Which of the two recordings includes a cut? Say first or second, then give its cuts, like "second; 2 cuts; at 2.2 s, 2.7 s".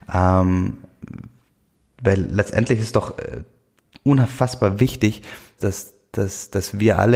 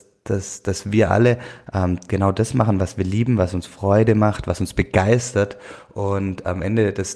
first; 1 cut; at 5.6 s